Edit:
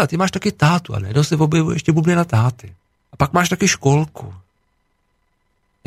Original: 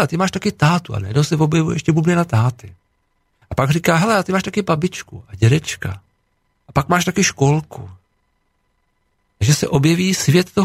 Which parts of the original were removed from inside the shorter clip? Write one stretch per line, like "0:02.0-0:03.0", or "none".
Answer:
0:03.0-0:06.5